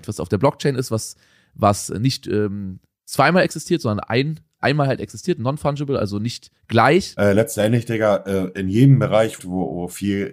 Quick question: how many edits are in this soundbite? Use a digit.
2